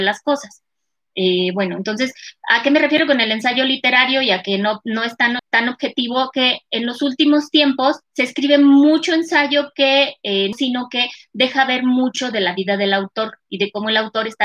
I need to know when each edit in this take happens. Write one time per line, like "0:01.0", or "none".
0:05.4
0:08.0
0:10.5